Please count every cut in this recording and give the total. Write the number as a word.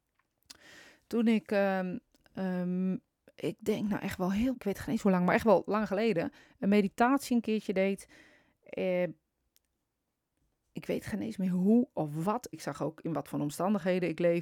two